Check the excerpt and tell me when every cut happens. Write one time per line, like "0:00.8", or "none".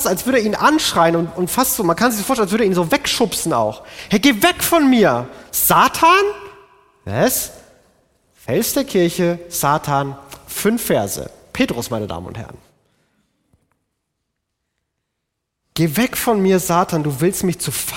none

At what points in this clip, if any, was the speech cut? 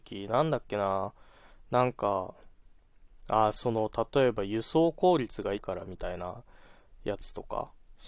0:05.5

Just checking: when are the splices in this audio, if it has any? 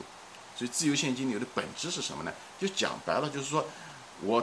none

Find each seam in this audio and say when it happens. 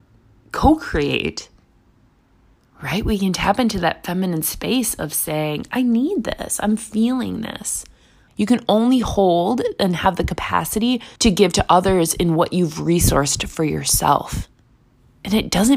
0:08.3
0:11.2

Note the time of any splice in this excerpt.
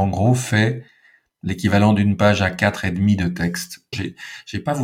0:03.9

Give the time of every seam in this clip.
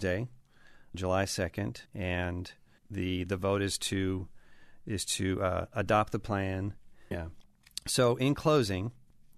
0:00.9
0:07.1

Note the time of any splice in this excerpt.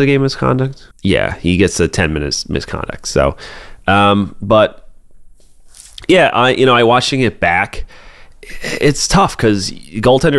0:00.9

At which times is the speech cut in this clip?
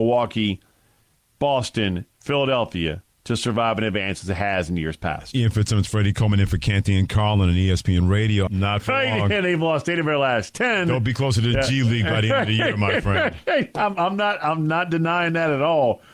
0:08.5

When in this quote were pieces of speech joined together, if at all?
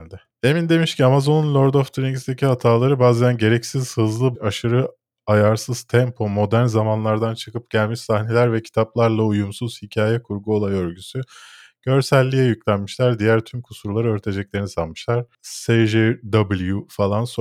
0:04.3

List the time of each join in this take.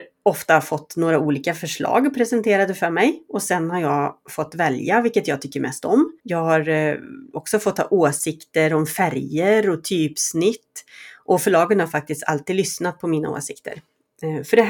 0:06.2

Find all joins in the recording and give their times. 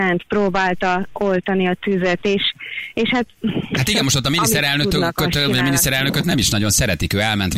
none

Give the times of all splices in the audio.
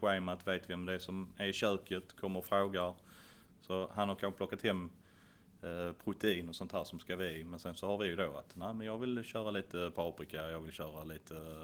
0:03.5

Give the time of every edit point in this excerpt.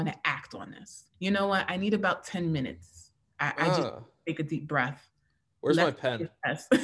0:01.1

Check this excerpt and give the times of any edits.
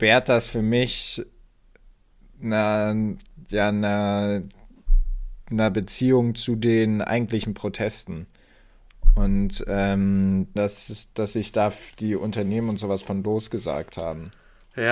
0:10.6
0:11.9

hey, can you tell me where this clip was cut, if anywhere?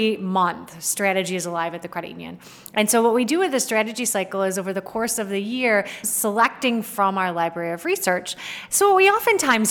0:06.0
0:08.7

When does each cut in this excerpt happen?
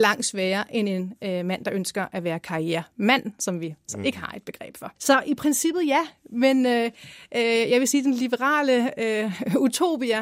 0:05.0

